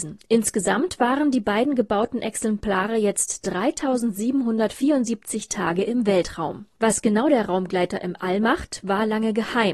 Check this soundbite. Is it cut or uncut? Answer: uncut